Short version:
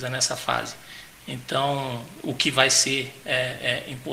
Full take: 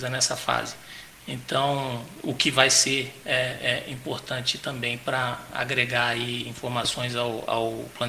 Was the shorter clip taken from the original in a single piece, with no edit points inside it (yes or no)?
yes